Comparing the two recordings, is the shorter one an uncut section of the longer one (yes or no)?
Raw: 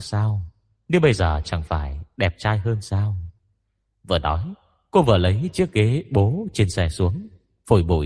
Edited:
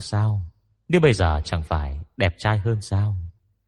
yes